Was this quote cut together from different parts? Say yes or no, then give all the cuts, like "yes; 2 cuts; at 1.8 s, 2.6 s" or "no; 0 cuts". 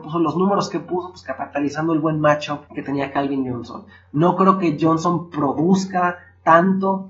yes; 1 cut; at 2.7 s